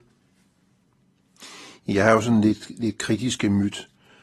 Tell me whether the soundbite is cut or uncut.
uncut